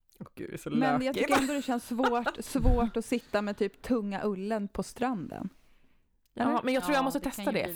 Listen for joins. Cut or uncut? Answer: uncut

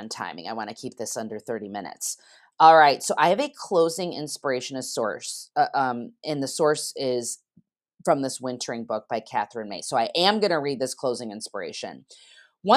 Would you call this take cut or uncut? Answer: uncut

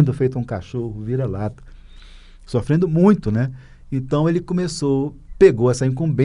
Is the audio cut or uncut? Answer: uncut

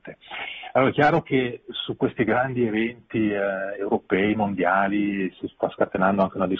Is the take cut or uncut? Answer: uncut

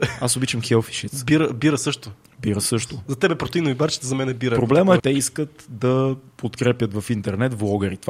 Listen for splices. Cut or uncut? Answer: cut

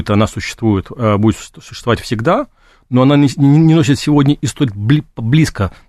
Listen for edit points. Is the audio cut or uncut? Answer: uncut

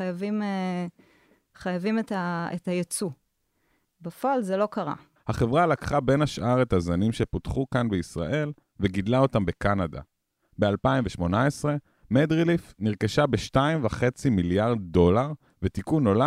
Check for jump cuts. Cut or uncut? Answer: cut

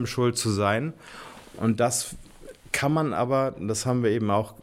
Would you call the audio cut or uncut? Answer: uncut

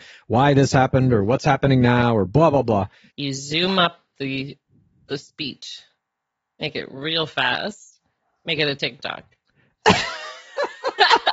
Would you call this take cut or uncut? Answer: cut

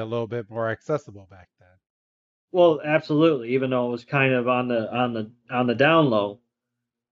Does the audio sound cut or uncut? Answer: uncut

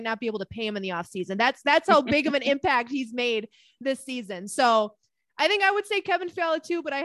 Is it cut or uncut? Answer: uncut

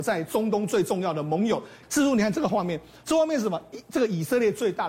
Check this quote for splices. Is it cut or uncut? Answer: cut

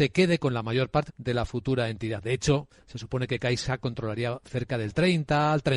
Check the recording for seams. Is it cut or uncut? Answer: cut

